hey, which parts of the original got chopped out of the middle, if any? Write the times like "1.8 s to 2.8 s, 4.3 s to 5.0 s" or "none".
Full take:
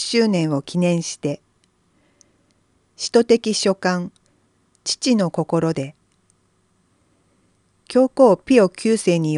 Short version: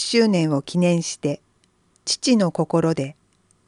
1.9 s to 4.7 s